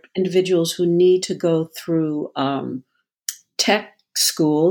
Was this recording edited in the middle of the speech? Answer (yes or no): no